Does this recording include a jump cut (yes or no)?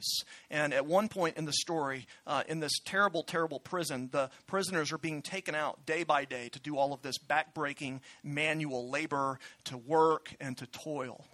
no